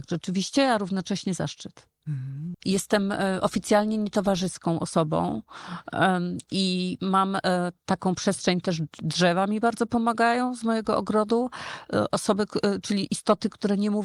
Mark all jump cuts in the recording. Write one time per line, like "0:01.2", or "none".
0:02.5